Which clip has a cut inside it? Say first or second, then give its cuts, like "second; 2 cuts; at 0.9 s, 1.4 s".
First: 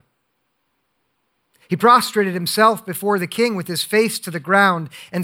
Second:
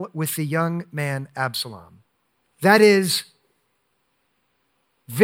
second; 1 cut; at 2.4 s